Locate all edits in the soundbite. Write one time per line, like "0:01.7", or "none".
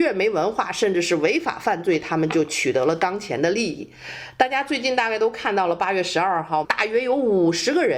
0:06.6